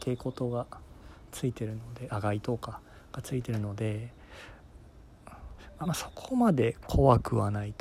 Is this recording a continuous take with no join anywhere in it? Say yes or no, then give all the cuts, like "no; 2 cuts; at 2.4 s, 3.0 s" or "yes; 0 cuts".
no; 1 cut; at 5.8 s